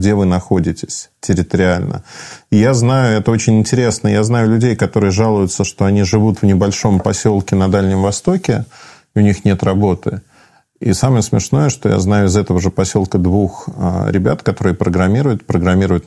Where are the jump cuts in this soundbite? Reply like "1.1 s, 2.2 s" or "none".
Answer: none